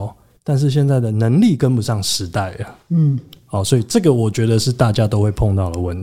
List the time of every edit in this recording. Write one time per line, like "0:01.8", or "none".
none